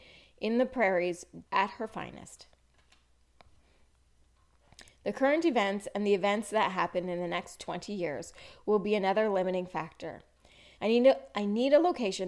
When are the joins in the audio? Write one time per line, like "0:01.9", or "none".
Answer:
0:01.5
0:10.8